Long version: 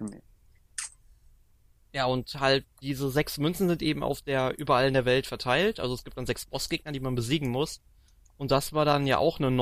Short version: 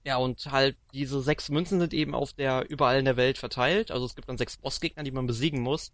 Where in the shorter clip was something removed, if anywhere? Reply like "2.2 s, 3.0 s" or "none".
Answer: none